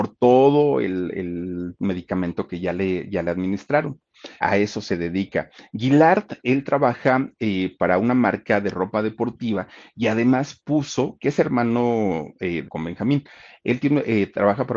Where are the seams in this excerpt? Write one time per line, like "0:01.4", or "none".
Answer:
0:04.4
0:12.6